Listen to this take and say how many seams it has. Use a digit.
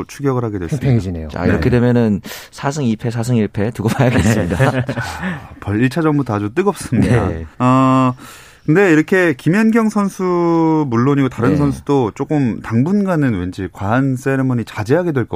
1